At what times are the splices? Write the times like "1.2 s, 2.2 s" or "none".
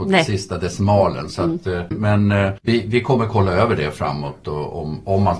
1.9 s